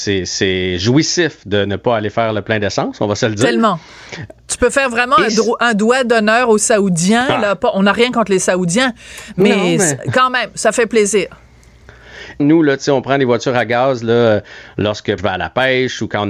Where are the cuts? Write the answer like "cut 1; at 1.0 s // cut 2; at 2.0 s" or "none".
cut 1; at 12.4 s // cut 2; at 15.2 s